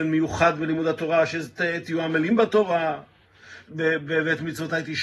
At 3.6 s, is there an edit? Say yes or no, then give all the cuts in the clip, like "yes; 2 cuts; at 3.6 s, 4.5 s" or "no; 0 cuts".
yes; 1 cut; at 3.6 s